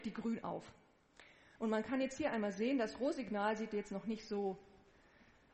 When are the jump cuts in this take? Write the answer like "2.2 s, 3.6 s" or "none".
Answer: 1.6 s